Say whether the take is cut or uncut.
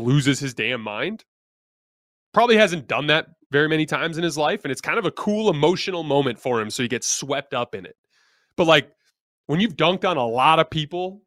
uncut